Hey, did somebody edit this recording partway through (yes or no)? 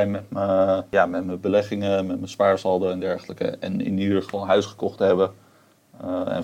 no